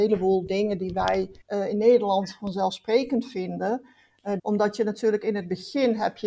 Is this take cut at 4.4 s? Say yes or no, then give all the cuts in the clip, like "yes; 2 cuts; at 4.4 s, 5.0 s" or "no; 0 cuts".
yes; 2 cuts; at 1.4 s, 4.4 s